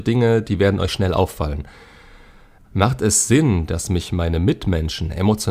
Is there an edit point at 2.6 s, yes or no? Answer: yes